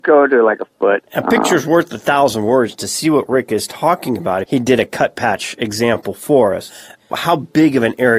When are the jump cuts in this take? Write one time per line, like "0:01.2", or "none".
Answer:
0:01.1
0:04.4